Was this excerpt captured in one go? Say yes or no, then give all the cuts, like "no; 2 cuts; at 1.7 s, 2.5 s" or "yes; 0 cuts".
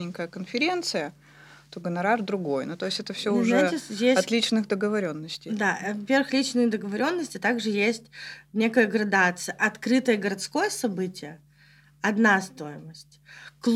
yes; 0 cuts